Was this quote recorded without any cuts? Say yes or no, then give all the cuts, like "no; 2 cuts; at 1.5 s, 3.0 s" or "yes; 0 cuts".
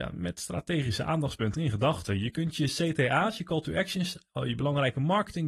yes; 0 cuts